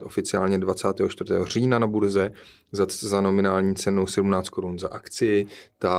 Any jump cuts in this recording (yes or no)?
no